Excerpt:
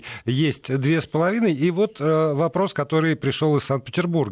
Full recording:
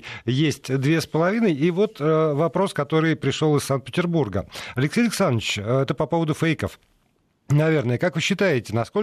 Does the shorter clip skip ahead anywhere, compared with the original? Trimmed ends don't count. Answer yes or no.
no